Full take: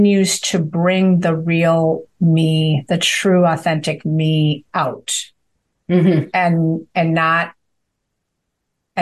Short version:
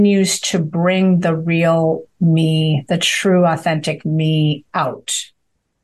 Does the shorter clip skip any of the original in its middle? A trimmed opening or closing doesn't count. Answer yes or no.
no